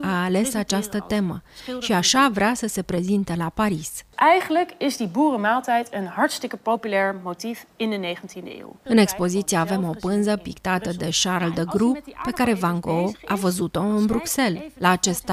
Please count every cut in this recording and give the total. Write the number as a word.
one